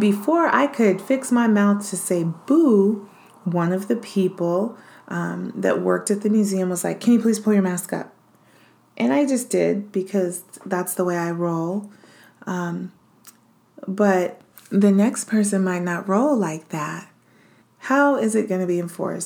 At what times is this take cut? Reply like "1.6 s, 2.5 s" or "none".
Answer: 17.6 s